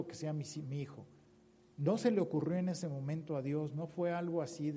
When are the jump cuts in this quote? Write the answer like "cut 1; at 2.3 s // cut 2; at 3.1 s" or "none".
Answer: none